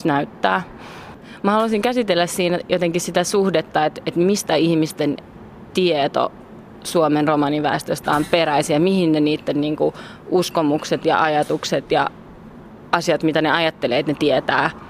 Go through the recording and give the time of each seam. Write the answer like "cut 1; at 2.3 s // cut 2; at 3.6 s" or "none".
none